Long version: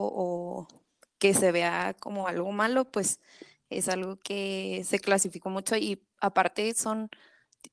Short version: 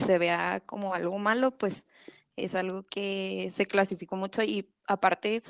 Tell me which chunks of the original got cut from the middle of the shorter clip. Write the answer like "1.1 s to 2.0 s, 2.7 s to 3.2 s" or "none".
none